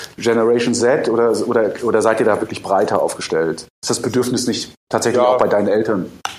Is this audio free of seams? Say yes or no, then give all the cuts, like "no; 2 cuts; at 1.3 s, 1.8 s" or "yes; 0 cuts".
yes; 0 cuts